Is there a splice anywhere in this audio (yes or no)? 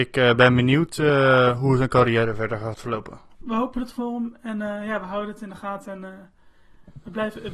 yes